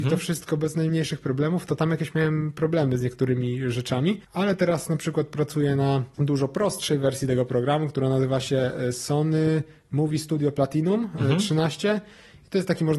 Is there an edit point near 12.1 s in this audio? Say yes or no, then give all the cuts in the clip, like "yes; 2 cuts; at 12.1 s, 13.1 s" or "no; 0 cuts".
no; 0 cuts